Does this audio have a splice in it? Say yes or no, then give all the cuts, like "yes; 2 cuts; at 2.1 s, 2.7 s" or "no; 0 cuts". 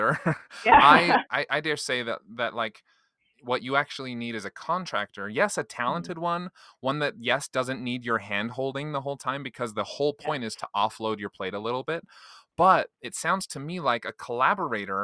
yes; 2 cuts; at 1.3 s, 12.9 s